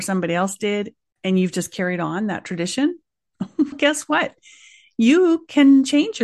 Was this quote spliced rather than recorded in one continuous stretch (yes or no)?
yes